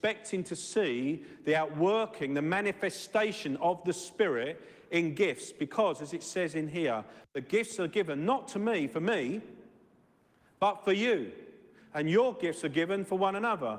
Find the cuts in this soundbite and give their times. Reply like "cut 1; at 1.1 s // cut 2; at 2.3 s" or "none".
none